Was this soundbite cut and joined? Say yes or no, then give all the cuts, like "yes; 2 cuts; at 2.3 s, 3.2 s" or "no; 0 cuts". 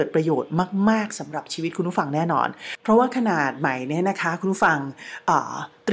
yes; 1 cut; at 2.8 s